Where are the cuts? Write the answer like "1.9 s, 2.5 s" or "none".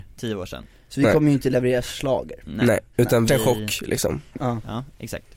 3.3 s, 4.4 s

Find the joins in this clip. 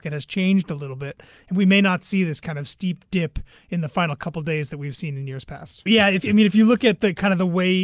5.9 s

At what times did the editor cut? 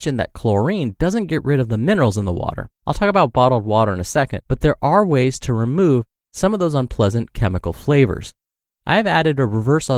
2.8 s, 4.5 s

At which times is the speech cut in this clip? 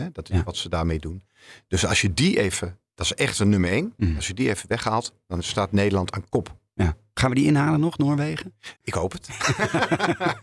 8.8 s

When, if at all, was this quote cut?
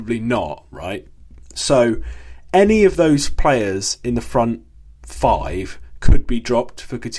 none

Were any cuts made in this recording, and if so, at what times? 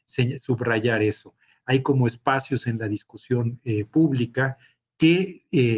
none

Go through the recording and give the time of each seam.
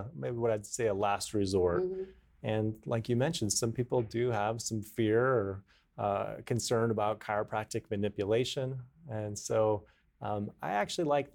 none

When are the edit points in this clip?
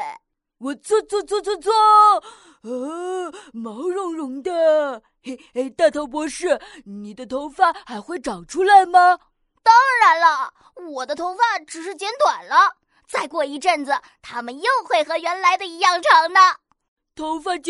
none

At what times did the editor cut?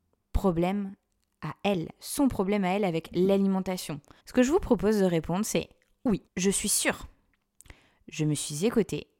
4.2 s, 6.3 s

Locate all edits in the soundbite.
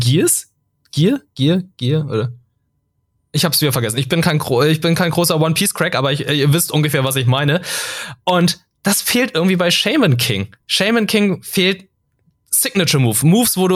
none

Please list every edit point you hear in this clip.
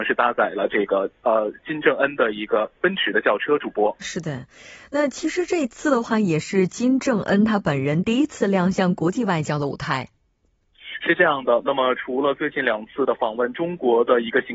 2.8 s, 4.0 s

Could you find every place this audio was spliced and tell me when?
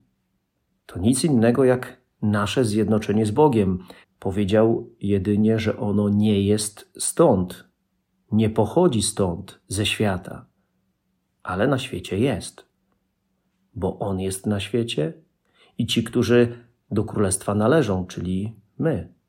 4.0 s

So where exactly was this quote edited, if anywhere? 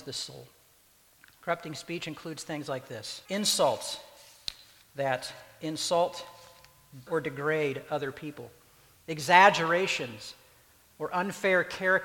3.3 s, 7.1 s

